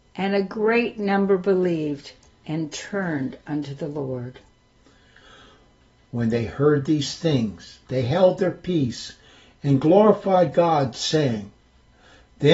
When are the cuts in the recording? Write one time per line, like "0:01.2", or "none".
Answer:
0:06.1